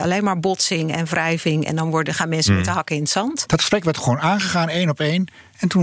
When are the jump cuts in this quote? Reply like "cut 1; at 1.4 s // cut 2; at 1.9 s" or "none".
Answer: cut 1; at 3.5 s